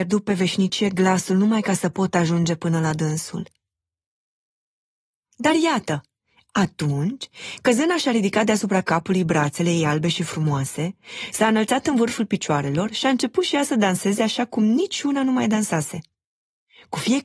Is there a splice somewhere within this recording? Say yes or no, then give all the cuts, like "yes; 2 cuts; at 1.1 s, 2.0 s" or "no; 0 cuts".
no; 0 cuts